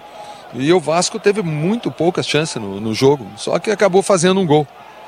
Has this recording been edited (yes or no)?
no